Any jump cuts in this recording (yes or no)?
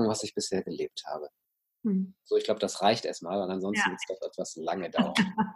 no